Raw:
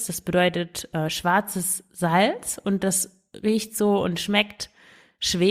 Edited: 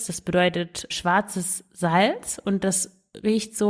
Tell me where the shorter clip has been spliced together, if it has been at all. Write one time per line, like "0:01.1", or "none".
0:00.9